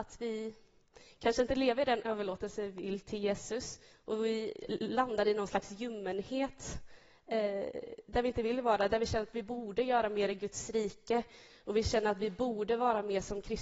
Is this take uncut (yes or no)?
yes